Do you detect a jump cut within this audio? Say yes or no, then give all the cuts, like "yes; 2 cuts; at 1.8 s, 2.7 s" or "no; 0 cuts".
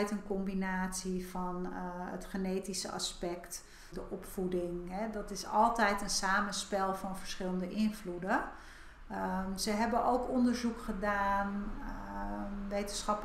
yes; 1 cut; at 3.9 s